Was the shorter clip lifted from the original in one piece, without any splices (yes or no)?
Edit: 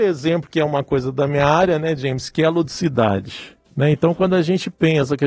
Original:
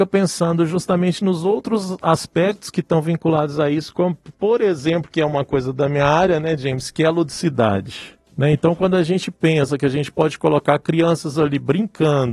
yes